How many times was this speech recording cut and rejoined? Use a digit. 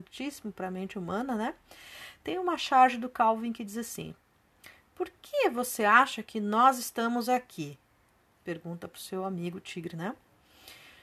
0